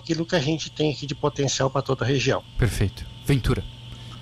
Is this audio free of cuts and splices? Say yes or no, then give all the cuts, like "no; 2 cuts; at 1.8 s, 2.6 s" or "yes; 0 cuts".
yes; 0 cuts